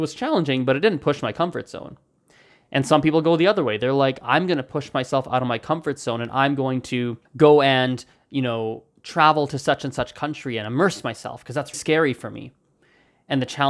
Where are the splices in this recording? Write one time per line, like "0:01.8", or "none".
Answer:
0:07.3
0:11.7